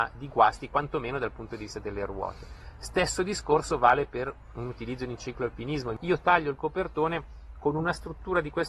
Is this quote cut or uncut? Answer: uncut